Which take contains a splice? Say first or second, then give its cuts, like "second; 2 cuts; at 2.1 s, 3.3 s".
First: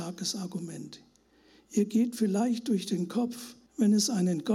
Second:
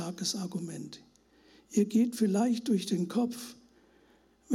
first; 1 cut; at 3.7 s